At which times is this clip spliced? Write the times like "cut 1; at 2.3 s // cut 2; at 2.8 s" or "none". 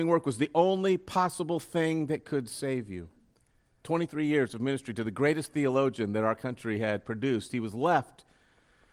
cut 1; at 3.8 s